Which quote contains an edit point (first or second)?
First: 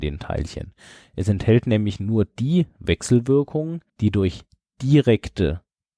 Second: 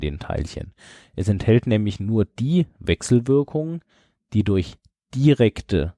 first